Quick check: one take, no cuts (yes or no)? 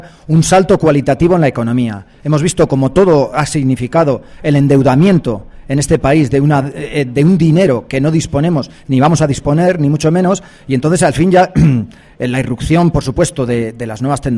yes